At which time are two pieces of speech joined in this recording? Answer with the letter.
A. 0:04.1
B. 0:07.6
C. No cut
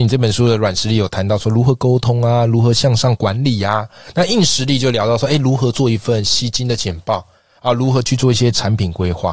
C